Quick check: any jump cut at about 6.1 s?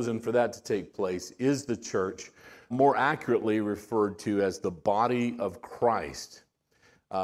no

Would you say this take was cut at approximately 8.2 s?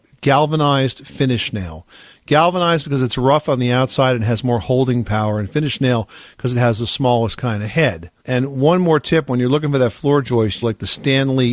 yes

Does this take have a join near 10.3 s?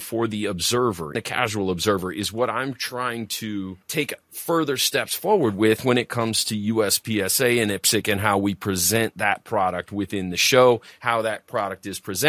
no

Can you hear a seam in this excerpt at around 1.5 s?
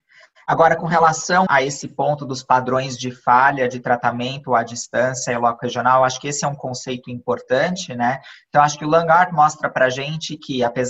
yes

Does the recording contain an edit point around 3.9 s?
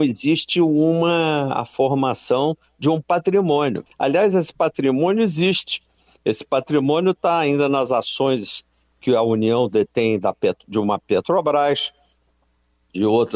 yes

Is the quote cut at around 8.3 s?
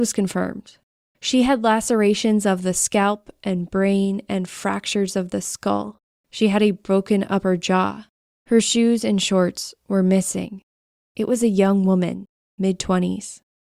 yes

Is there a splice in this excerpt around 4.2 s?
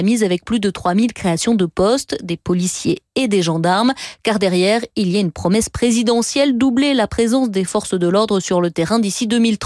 no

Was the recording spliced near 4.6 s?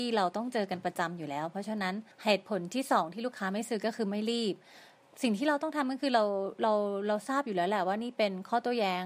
no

